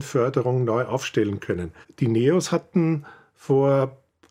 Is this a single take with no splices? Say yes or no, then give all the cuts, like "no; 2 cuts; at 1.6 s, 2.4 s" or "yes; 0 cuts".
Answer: no; 1 cut; at 1.8 s